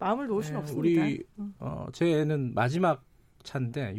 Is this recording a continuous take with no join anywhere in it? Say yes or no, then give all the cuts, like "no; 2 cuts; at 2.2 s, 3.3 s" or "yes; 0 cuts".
yes; 0 cuts